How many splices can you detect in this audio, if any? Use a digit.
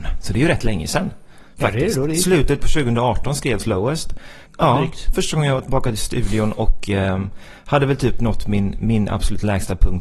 1